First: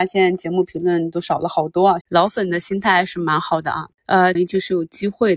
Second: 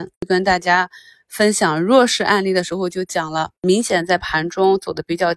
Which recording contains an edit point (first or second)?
first